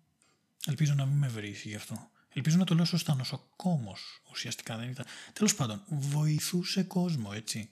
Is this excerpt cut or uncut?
uncut